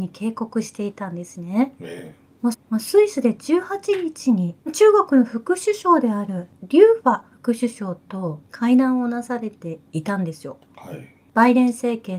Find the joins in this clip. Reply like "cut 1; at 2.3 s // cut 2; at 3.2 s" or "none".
cut 1; at 2.5 s